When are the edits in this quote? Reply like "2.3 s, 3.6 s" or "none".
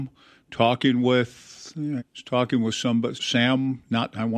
2.0 s, 3.1 s